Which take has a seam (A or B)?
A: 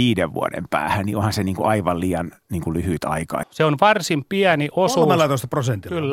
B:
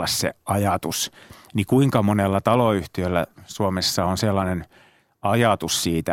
A